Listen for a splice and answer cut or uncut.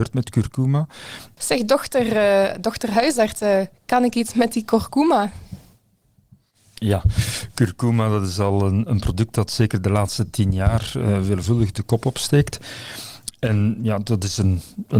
cut